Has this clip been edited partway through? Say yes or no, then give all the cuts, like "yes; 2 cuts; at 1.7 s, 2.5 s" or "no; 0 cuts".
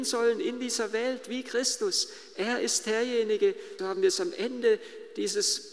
yes; 1 cut; at 3.8 s